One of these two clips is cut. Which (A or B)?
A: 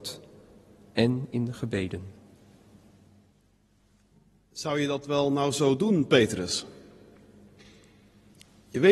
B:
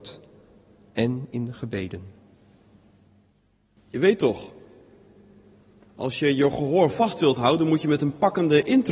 B